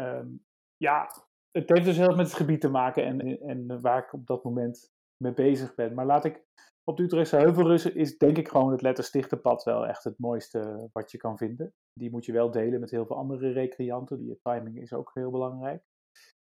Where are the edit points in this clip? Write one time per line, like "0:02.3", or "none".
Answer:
0:03.2
0:11.8
0:14.2